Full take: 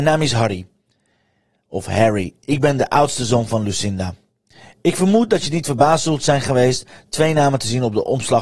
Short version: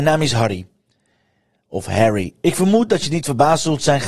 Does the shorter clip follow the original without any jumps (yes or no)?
no